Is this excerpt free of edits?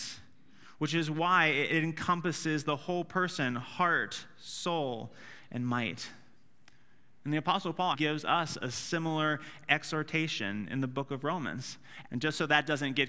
no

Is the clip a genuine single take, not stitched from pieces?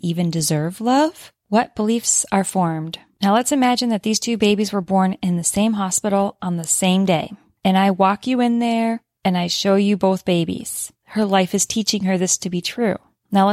no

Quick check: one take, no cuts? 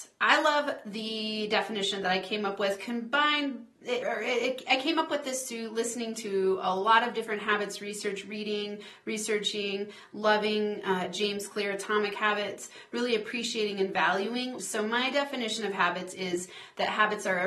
no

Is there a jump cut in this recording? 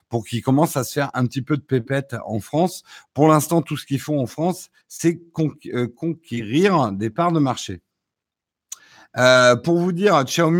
no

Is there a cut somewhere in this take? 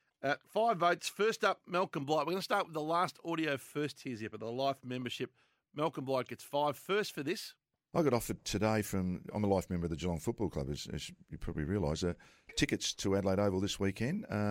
no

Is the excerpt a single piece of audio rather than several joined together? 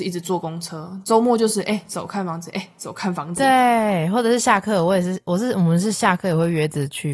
yes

